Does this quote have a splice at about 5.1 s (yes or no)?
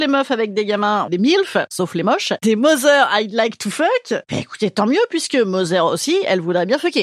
no